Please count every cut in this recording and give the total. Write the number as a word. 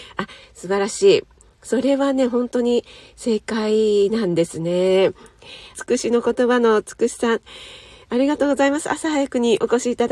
one